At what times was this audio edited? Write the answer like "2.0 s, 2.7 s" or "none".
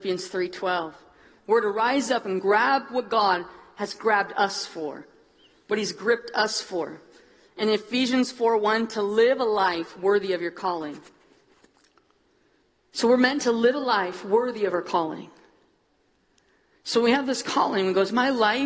none

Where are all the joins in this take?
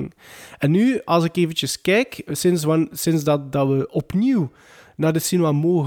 none

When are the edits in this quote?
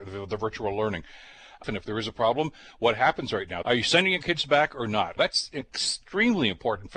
1.6 s, 3.6 s, 5.2 s

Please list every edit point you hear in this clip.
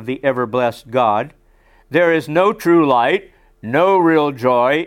none

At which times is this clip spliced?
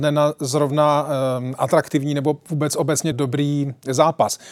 3.1 s

